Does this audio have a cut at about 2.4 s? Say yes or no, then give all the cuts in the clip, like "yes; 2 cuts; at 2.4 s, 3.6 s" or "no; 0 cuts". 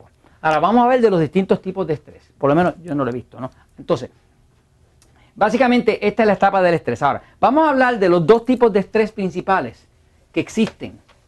yes; 1 cut; at 2.4 s